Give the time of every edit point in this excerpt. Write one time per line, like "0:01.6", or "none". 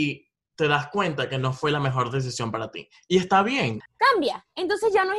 0:03.9